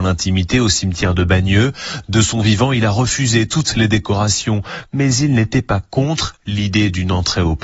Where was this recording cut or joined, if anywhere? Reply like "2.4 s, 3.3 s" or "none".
none